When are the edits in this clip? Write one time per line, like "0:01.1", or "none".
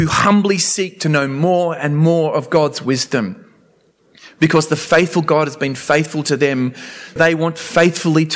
0:07.2